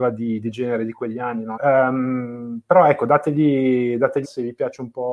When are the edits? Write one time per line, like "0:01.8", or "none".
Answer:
0:01.5
0:04.2